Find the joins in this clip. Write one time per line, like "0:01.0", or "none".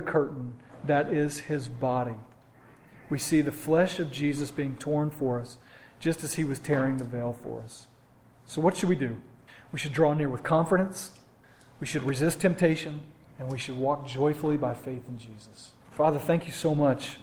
0:15.8